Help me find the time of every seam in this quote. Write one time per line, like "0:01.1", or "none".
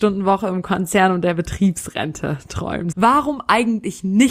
0:02.9